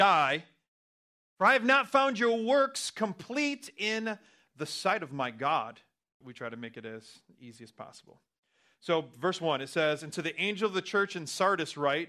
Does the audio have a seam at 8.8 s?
no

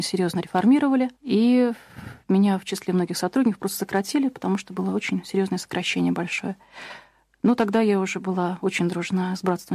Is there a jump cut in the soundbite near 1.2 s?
yes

